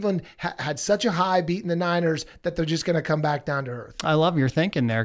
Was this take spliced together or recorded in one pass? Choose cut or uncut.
cut